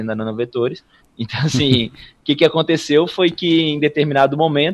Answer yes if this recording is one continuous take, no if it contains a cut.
no